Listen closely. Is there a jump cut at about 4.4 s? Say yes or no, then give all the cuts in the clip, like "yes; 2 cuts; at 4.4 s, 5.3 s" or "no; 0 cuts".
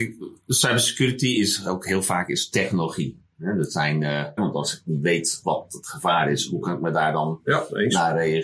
yes; 1 cut; at 4.4 s